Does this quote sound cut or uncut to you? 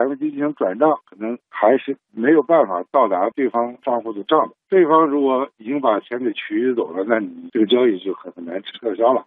cut